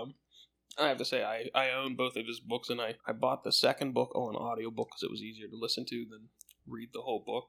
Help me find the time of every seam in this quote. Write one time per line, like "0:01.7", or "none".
0:03.0